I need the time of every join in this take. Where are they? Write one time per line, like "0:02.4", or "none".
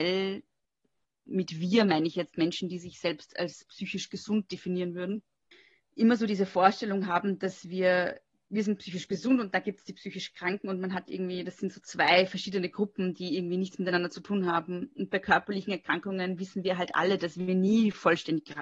none